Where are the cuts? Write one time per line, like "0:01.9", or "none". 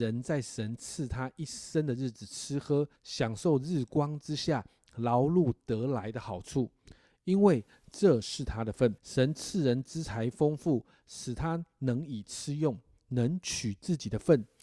0:03.0
0:09.0